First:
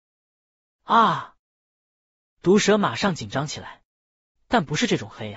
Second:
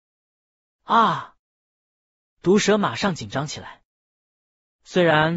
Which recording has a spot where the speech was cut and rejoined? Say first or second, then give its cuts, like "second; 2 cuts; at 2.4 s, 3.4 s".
first; 1 cut; at 4.4 s